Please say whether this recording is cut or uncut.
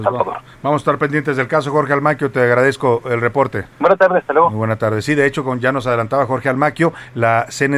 cut